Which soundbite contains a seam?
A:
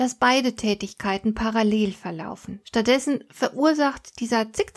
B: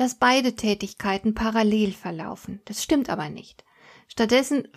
A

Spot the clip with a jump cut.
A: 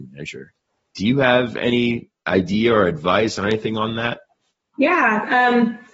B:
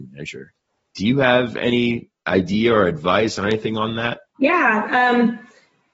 B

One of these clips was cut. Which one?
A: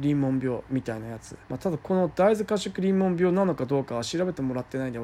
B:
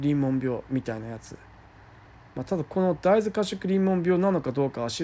A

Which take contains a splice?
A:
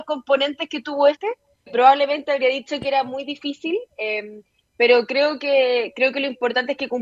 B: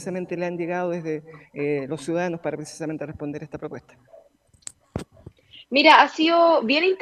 A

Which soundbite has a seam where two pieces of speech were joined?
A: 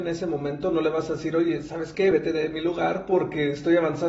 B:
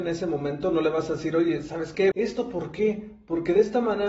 B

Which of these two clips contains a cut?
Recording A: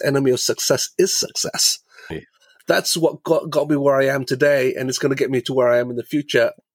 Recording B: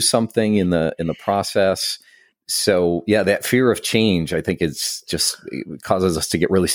A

